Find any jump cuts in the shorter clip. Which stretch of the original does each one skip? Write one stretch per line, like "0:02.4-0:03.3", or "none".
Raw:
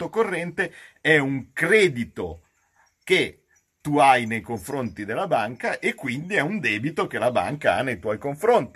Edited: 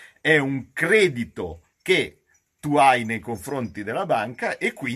0:02.5-0:02.9